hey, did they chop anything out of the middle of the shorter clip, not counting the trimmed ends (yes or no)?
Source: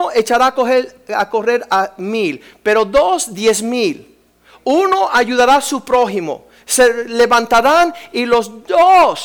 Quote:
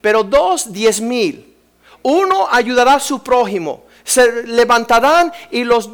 no